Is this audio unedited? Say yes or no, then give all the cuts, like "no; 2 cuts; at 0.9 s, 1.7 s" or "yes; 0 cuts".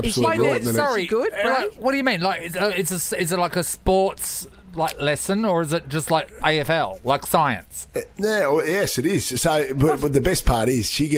no; 1 cut; at 8.1 s